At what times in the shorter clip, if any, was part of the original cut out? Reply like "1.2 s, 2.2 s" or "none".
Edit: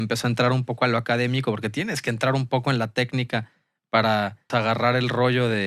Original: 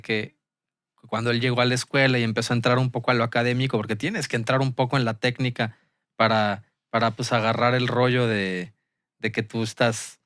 4.5 s